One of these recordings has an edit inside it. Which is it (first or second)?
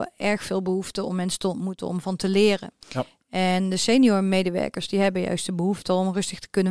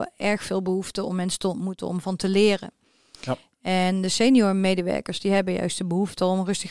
first